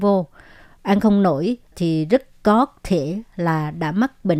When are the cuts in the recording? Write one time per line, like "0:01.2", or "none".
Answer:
0:01.7